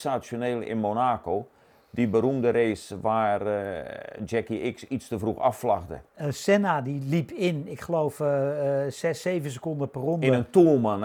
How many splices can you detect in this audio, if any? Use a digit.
1